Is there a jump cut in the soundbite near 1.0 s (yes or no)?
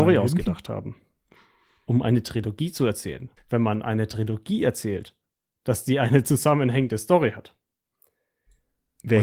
no